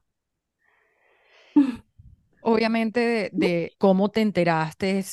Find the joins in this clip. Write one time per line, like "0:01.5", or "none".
0:02.4
0:03.7